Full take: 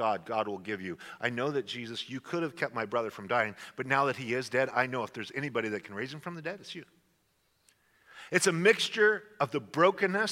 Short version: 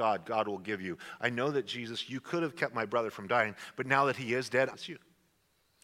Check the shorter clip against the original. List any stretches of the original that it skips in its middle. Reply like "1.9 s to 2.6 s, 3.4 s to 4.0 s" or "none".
4.7 s to 6.6 s